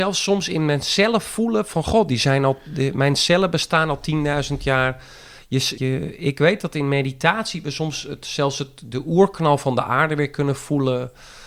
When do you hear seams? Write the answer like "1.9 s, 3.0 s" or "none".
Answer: 5.8 s

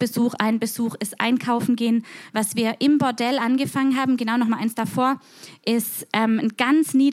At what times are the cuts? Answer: 2.3 s

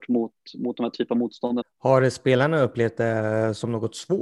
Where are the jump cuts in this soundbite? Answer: 1.6 s

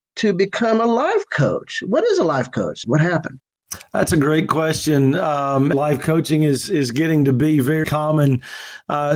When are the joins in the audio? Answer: 2.8 s, 5.7 s, 7.8 s

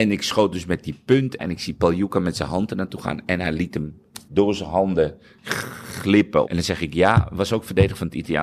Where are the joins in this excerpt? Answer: 1.4 s, 4.2 s, 6.4 s

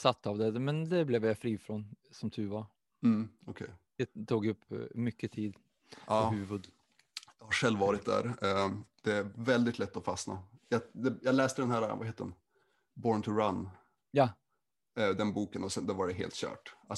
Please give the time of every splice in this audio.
none

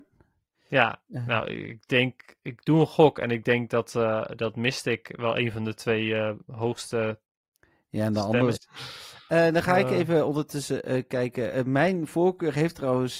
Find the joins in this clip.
8.6 s

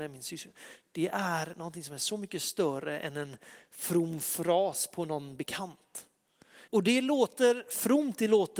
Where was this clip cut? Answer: 6.7 s

